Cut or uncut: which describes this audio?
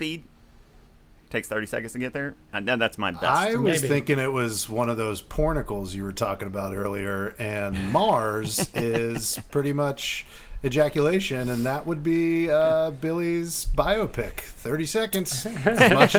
uncut